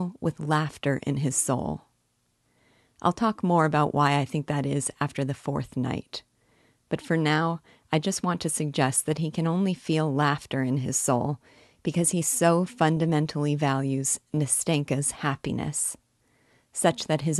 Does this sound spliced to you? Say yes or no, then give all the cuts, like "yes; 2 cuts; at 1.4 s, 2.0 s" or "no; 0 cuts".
no; 0 cuts